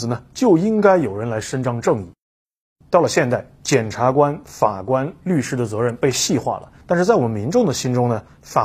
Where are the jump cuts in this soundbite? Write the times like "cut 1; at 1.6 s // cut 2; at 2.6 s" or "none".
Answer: none